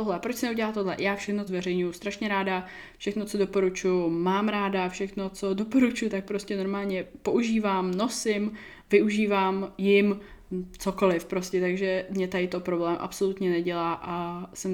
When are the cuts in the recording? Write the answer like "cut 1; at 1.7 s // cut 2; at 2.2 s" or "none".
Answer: cut 1; at 1.5 s